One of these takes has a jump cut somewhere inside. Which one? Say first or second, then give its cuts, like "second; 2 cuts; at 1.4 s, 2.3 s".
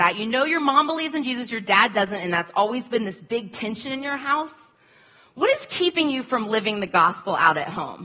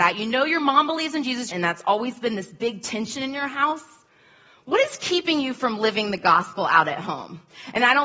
second; 1 cut; at 1.5 s